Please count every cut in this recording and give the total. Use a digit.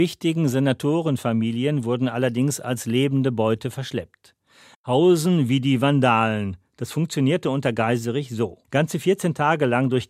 2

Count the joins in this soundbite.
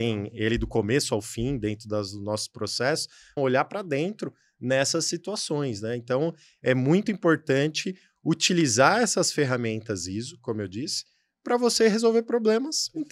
1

